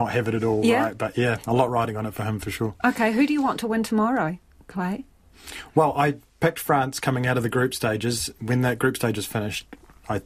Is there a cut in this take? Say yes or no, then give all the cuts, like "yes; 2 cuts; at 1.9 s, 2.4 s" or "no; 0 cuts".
no; 0 cuts